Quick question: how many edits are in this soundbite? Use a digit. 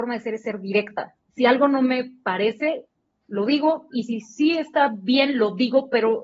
0